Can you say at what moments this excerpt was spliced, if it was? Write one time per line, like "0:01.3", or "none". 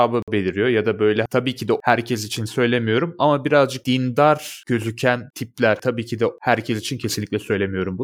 none